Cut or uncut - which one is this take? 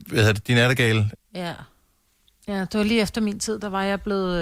cut